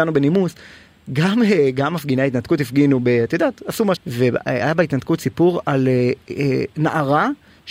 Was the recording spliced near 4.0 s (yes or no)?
yes